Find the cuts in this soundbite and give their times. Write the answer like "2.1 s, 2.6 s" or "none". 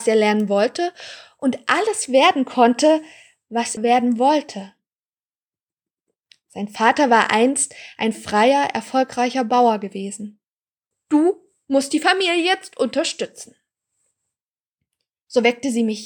3.8 s, 10.9 s